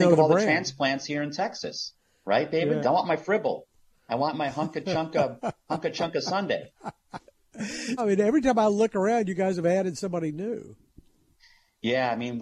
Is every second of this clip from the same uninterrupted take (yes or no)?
no